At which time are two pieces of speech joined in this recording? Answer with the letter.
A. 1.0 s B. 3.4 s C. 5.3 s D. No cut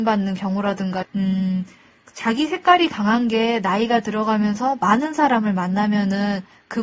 A